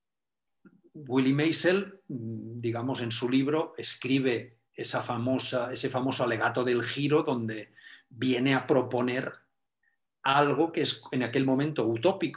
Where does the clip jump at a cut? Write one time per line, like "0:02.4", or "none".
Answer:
0:04.7

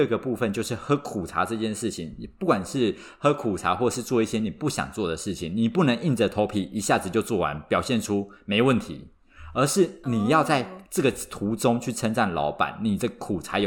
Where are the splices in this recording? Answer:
none

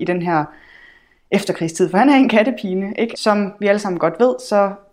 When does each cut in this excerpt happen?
0:03.1

